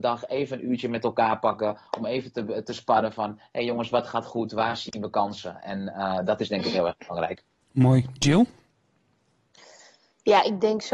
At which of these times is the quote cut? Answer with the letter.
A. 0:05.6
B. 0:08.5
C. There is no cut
C